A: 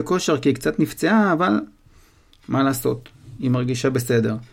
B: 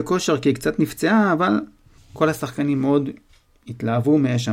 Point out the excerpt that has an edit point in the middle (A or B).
B